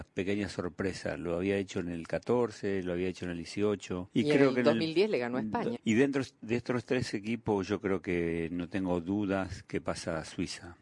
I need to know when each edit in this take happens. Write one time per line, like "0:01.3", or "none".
0:04.1
0:05.8